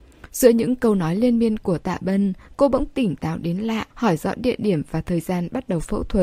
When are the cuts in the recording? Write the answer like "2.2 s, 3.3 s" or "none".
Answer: 3.9 s